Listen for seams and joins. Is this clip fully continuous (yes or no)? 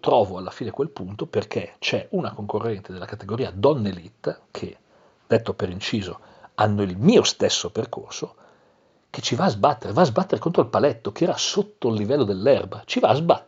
yes